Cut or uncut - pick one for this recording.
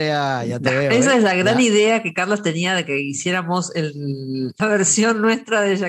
cut